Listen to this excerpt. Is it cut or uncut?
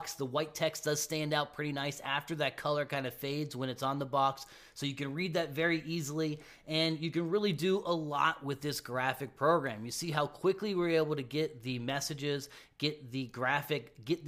uncut